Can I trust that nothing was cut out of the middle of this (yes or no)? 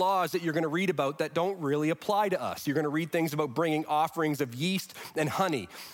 yes